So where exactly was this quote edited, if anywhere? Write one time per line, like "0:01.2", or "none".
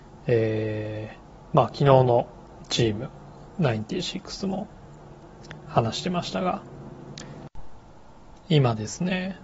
0:08.4

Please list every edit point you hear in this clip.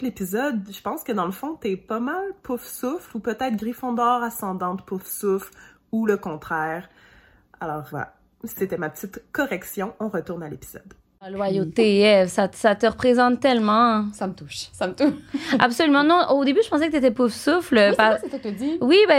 0:07.9

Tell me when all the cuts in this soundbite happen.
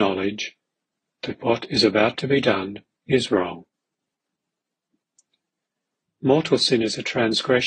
0:06.0

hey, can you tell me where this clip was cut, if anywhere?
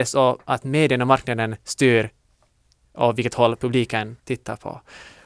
0:04.2

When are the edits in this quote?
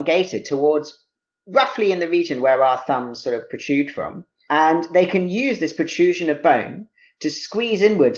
none

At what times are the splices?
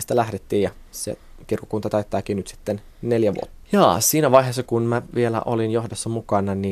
0:03.6
0:04.7

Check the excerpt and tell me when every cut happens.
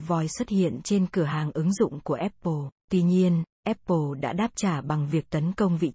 0:02.8

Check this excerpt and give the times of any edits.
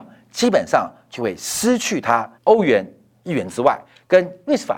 0:02.4

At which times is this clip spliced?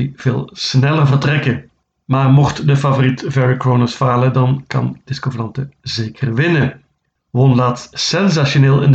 0:07.2

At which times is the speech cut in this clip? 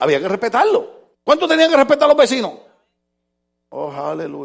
0:01.1

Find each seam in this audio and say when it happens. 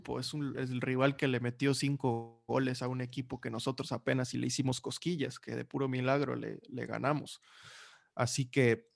none

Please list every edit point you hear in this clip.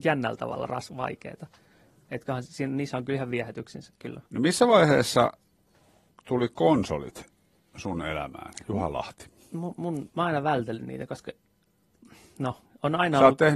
0:04.3

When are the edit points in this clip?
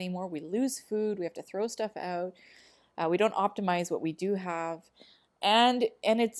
none

